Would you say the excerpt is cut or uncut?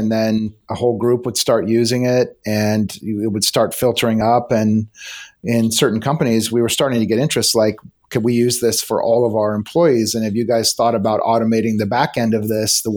uncut